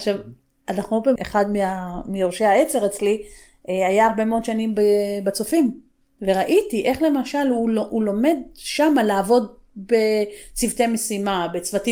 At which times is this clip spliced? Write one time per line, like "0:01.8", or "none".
0:01.2